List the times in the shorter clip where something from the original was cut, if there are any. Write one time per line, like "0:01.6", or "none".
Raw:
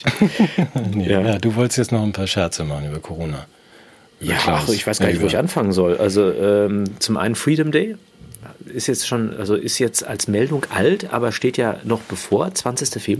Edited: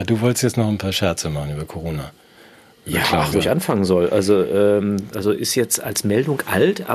0:03.3
0:05.1